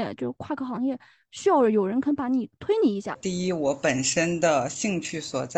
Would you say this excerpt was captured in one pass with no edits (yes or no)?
yes